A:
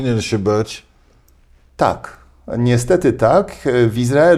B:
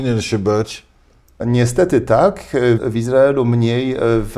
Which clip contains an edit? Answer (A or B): B